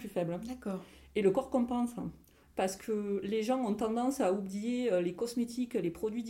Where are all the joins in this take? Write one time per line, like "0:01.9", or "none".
0:02.4

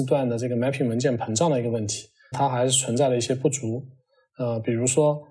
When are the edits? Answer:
0:02.3

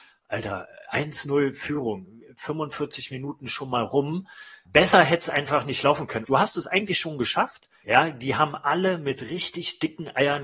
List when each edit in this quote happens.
0:06.3
0:07.8

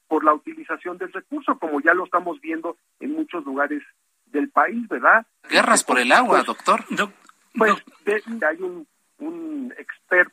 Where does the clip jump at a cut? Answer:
0:08.4

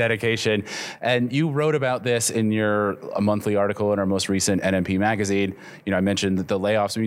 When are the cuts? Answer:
none

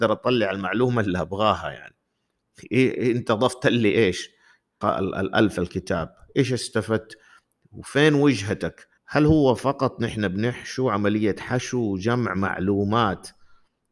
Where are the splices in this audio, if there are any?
0:04.8
0:09.0

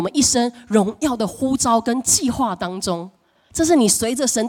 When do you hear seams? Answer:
none

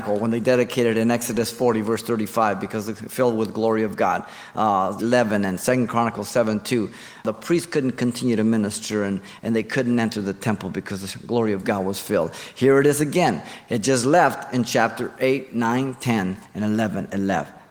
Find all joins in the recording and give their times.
0:05.0

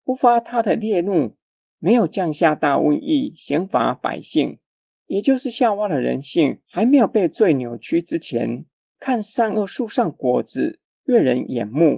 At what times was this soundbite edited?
0:04.9
0:09.0

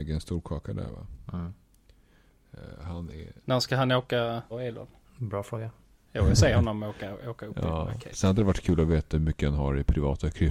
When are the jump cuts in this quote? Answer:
0:04.5

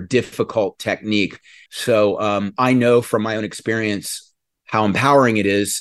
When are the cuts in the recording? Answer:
0:01.7

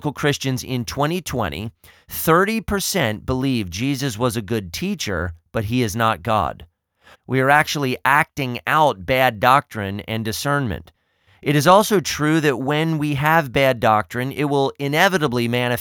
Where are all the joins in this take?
0:07.1

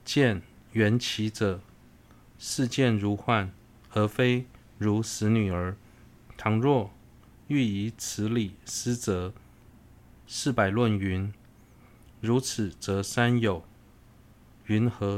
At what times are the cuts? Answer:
0:10.2

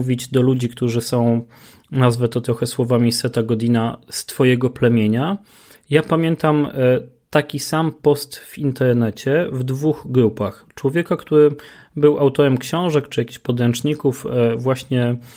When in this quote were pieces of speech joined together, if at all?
none

